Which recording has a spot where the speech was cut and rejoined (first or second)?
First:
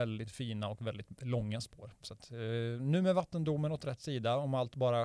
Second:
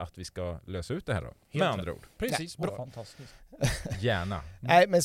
second